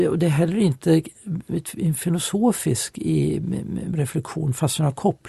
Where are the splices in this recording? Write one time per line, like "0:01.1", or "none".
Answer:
none